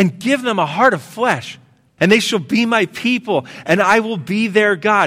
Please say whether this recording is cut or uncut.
cut